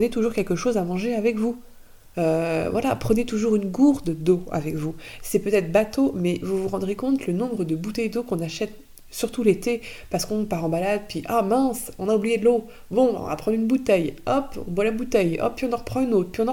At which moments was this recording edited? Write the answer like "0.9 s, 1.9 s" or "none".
2.1 s